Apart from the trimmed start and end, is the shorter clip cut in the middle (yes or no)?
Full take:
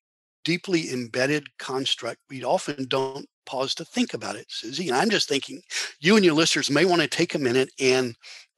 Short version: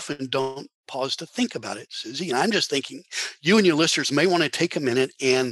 no